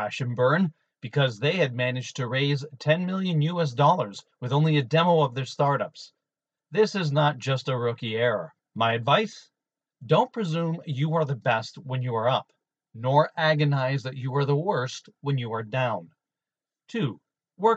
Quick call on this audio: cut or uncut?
cut